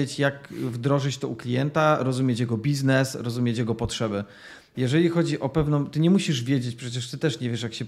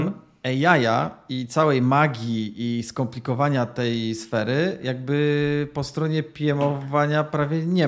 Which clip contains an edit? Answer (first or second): first